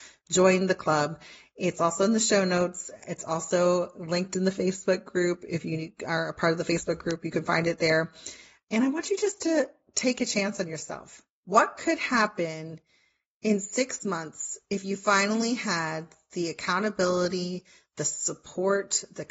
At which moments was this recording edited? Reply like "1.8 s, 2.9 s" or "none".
none